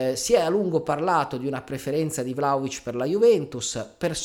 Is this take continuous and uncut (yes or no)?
yes